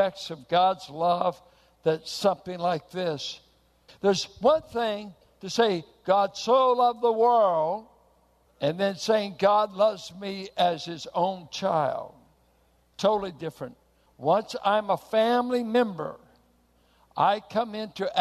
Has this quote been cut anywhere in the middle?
yes; 1 cut; at 3.9 s

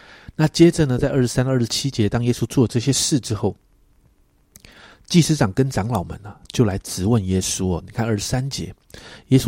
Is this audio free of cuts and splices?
yes; 0 cuts

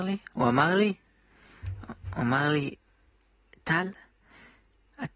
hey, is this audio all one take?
yes; 0 cuts

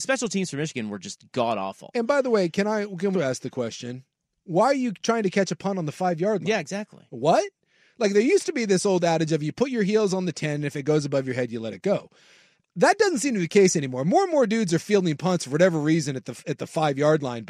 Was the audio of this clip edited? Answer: yes; 1 cut; at 3.1 s

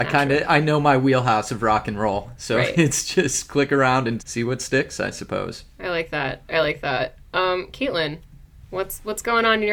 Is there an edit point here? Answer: yes; 1 cut; at 4.2 s

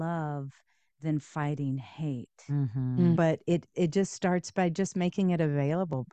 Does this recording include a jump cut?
yes; 1 cut; at 3.2 s

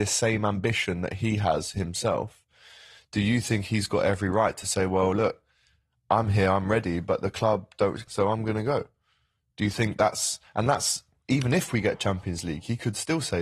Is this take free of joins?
no; 1 cut; at 8.1 s

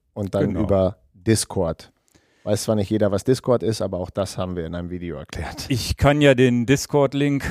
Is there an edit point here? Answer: no; 0 cuts

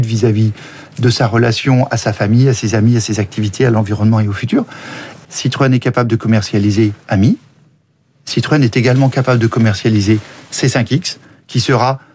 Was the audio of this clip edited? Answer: yes; 1 cut; at 5.2 s

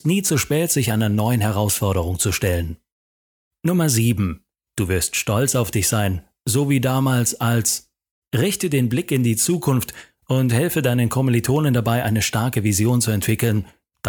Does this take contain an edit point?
no; 0 cuts

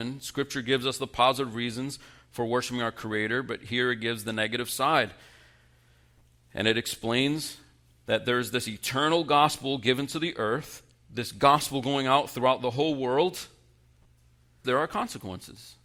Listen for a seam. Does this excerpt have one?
yes; 2 cuts; at 10.9 s, 14.6 s

